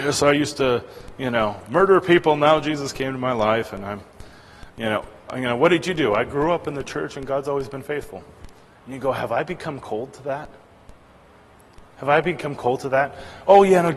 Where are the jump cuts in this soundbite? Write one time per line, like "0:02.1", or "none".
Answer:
0:08.7

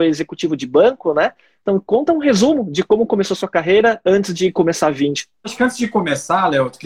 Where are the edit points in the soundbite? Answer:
none

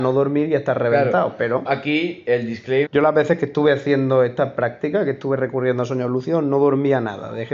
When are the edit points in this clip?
0:01.7
0:02.9

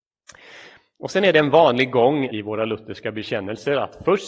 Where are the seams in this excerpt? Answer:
0:02.3

